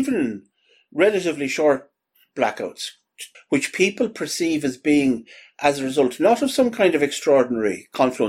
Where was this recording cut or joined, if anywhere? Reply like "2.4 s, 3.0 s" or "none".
3.3 s